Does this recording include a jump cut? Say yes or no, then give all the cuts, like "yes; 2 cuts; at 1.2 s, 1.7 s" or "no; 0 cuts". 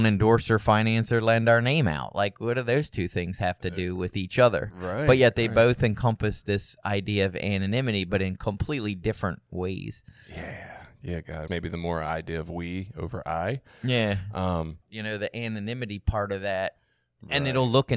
yes; 2 cuts; at 11.5 s, 14.8 s